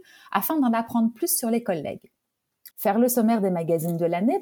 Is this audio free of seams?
no; 1 cut; at 2.7 s

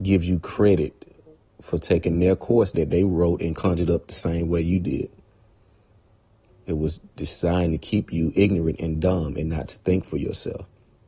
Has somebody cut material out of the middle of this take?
yes; 1 cut; at 6.5 s

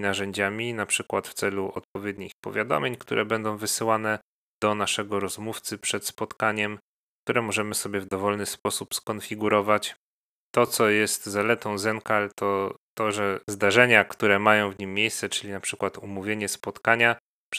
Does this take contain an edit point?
no; 0 cuts

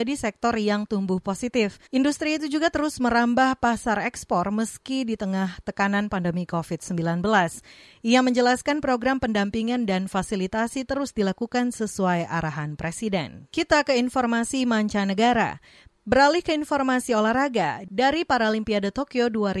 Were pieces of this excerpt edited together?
yes; 2 cuts; at 1.9 s, 15.9 s

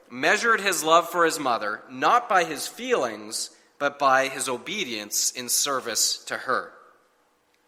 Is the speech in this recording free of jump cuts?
yes; 0 cuts

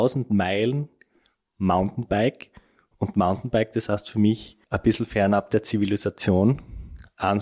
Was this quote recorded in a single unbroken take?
no; 1 cut; at 4.6 s

